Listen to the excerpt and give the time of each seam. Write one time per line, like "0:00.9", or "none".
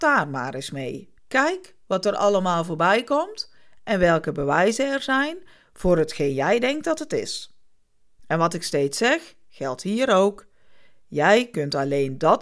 0:01.2
0:08.2